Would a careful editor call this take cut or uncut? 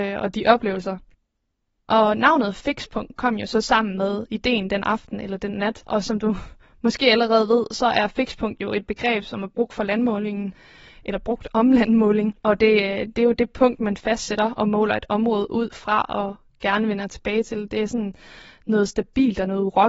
uncut